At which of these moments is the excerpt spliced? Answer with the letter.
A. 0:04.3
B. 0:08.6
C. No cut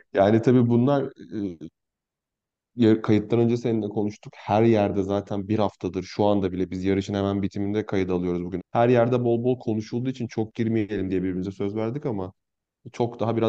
B